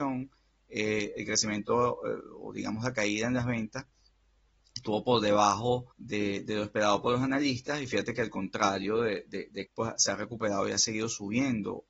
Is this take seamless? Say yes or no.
no